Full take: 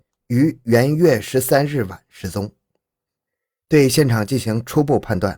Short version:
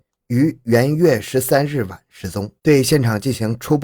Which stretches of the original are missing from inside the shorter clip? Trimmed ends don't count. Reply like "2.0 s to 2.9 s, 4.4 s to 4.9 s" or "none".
2.6 s to 3.6 s